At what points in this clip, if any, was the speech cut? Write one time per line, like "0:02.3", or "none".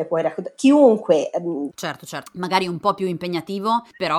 0:01.7